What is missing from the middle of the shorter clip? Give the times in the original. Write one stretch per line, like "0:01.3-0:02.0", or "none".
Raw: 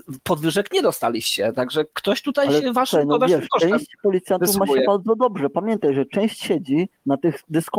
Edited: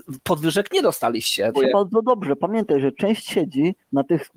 0:01.5-0:04.7